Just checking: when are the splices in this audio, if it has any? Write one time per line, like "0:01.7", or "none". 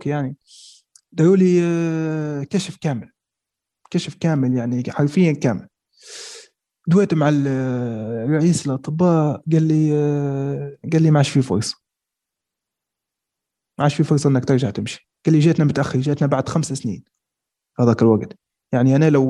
0:10.8
0:15.2